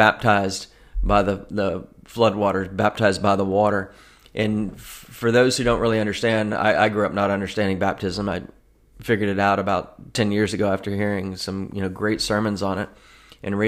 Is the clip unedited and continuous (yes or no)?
yes